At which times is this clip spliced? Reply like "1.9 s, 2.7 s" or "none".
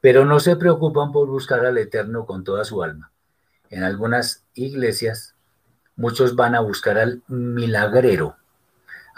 none